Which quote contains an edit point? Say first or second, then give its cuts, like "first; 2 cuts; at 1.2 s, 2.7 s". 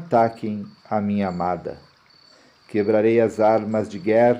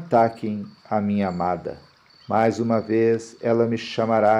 second; 1 cut; at 2.2 s